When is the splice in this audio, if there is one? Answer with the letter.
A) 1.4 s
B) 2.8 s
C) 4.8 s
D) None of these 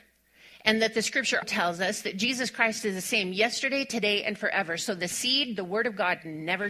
A